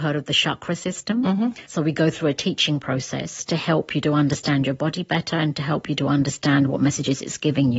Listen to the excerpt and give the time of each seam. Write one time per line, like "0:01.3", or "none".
0:01.7